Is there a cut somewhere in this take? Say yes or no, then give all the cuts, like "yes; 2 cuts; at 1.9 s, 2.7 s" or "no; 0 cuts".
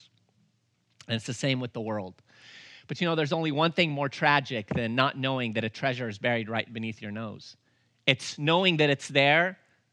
no; 0 cuts